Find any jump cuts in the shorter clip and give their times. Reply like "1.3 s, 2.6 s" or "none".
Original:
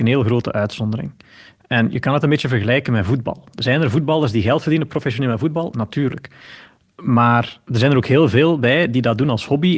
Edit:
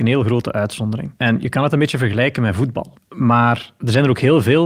1.1 s, 3.0 s